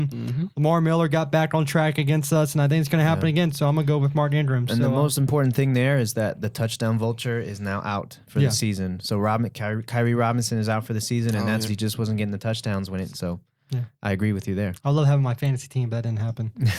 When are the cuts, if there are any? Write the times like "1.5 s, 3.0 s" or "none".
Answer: 11.7 s, 13.1 s